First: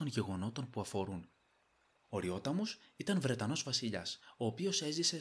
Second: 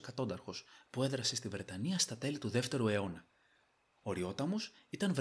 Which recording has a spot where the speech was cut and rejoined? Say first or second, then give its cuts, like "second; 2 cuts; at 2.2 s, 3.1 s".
first; 1 cut; at 2.0 s